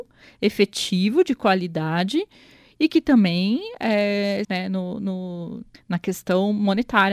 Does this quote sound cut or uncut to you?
cut